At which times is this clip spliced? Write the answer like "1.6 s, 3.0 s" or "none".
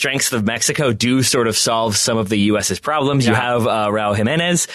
none